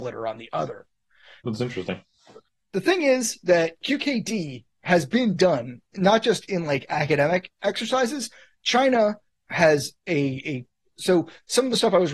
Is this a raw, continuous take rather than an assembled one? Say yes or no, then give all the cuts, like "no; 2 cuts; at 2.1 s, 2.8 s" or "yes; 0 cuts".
no; 1 cut; at 1.4 s